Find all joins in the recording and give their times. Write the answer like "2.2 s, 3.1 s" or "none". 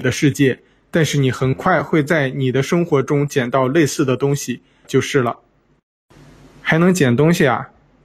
4.8 s